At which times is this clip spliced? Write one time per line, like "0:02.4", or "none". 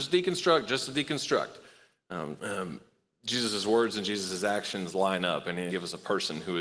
0:02.4
0:05.7